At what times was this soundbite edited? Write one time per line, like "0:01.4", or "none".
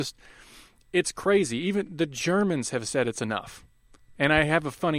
0:04.0